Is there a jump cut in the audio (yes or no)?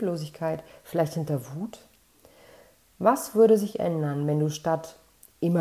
no